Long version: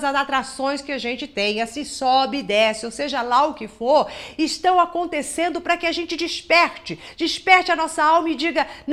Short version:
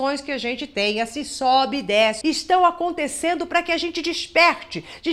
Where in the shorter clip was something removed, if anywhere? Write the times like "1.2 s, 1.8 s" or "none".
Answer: 2.2 s